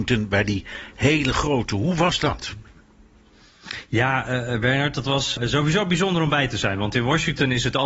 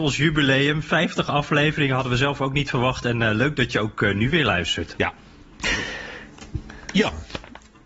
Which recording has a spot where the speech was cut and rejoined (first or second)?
first